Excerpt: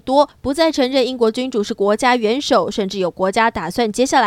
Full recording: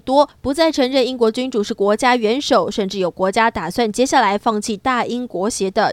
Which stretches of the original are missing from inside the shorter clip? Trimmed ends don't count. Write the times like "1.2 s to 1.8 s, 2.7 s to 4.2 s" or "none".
none